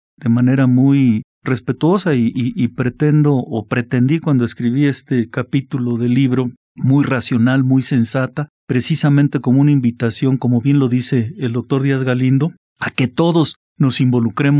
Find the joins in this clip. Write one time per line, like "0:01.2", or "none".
none